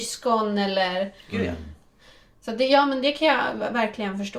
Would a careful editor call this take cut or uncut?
uncut